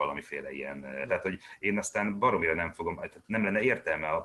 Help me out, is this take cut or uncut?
cut